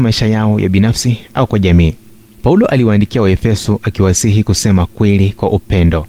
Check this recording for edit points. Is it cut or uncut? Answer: cut